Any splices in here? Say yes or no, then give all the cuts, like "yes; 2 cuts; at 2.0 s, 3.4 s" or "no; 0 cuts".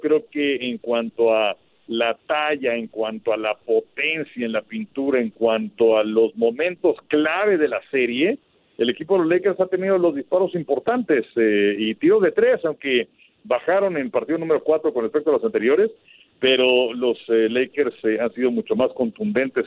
no; 0 cuts